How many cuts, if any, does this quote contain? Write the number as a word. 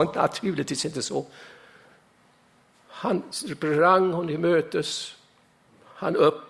zero